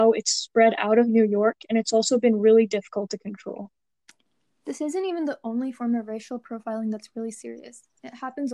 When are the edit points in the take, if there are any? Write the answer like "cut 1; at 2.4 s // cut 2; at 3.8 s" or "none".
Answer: none